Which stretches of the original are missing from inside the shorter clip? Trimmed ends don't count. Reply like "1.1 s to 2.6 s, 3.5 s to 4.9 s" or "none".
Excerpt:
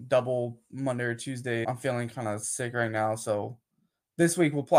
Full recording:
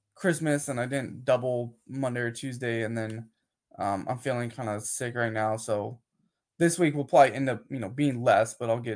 2.8 s to 4.0 s